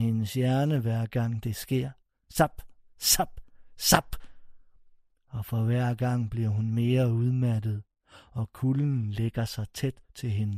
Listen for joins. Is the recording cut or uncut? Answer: uncut